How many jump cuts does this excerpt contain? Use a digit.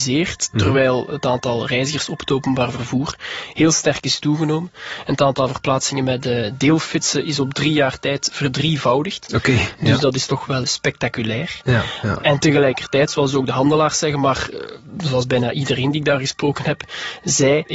1